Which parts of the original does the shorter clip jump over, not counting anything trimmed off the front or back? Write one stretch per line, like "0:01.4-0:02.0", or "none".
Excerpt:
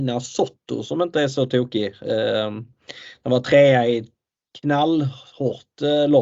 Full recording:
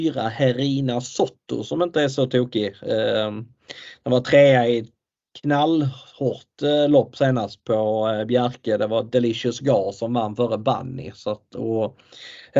none